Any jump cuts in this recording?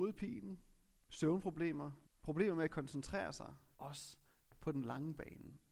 yes; 2 cuts; at 2.0 s, 3.7 s

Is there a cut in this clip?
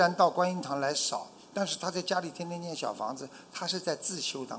no; 0 cuts

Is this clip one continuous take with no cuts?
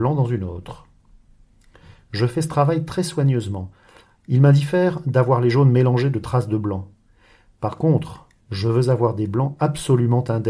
yes; 0 cuts

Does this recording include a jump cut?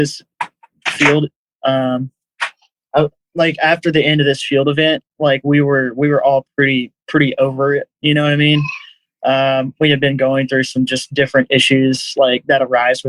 no; 0 cuts

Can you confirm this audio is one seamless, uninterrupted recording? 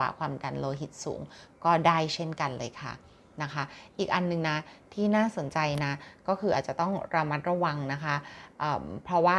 yes; 0 cuts

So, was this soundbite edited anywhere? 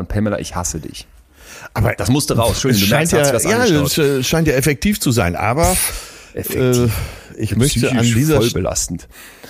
no; 0 cuts

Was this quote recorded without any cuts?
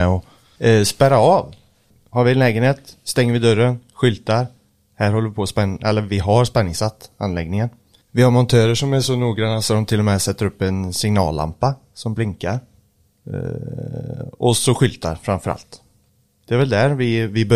yes; 0 cuts

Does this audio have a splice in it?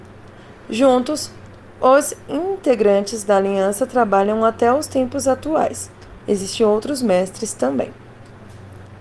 yes; 1 cut; at 6.2 s

